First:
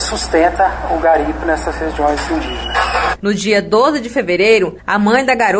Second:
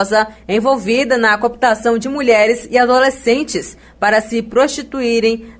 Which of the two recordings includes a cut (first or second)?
first